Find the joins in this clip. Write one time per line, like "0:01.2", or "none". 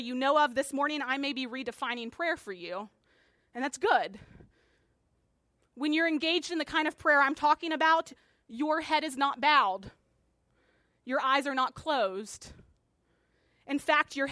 none